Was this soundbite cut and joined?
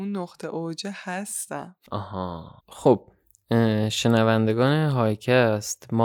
yes; 1 cut; at 2.6 s

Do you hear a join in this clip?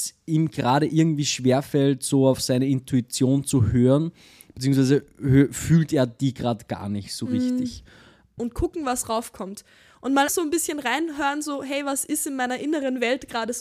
yes; 2 cuts; at 8.4 s, 10.3 s

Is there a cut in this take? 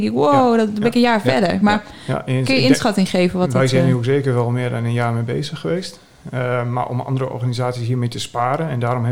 no; 0 cuts

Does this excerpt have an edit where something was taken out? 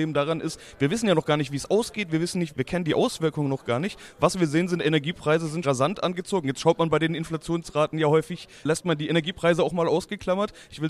yes; 2 cuts; at 2.5 s, 5.6 s

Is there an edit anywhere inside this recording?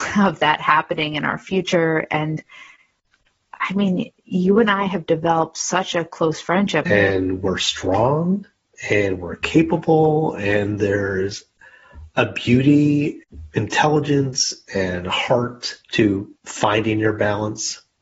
yes; 2 cuts; at 6.9 s, 15.8 s

